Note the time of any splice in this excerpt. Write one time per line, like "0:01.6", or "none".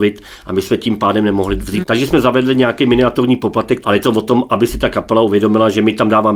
0:01.8
0:03.8